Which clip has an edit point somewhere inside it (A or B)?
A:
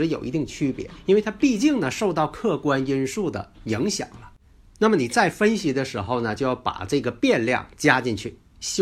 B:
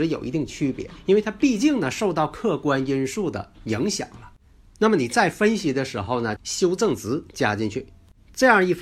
B